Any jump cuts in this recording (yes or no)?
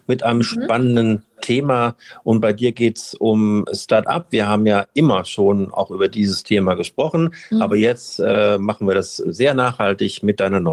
no